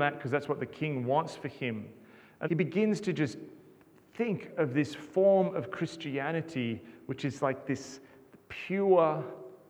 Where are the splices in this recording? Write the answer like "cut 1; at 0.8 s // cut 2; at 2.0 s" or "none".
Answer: cut 1; at 2.4 s

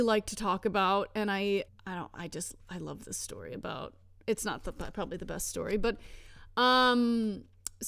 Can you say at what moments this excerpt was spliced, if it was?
cut 1; at 1.7 s

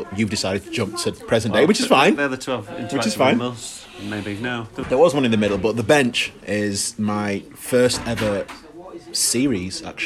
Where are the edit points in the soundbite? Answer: cut 1; at 4.8 s

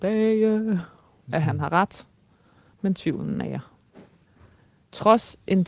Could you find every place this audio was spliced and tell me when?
cut 1; at 1.3 s

